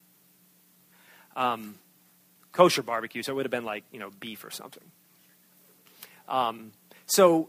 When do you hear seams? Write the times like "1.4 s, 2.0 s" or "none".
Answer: none